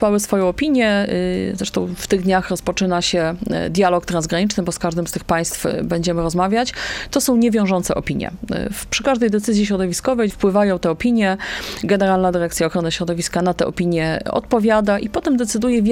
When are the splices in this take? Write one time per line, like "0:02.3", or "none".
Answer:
0:10.3